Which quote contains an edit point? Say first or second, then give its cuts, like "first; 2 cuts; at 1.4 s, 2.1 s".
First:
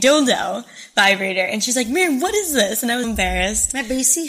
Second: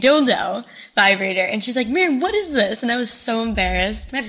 first; 1 cut; at 3.0 s